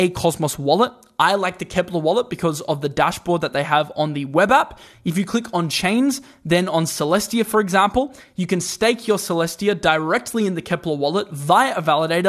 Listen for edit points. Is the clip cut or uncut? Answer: uncut